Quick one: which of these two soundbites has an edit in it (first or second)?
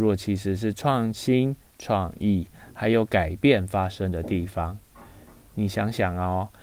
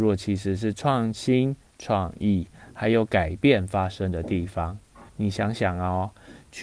second